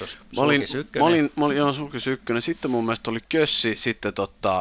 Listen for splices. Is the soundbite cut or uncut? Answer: uncut